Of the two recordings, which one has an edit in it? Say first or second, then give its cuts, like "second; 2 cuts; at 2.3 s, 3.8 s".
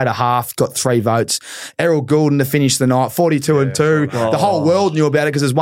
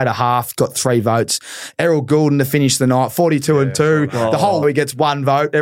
second; 1 cut; at 4.6 s